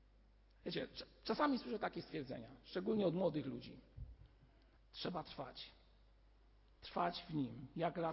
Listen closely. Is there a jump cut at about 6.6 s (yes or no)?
no